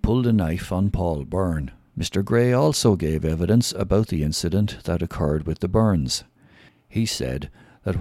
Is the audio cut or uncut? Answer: cut